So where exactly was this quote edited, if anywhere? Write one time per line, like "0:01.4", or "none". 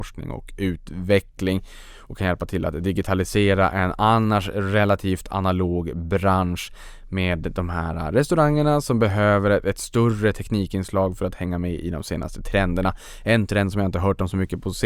none